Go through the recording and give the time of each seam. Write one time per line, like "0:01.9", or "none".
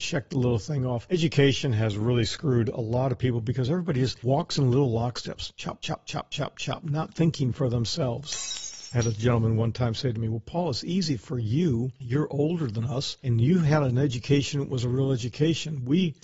none